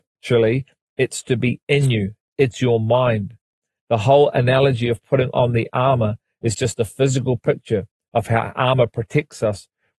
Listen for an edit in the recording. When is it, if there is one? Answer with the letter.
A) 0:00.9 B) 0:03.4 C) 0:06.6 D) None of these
D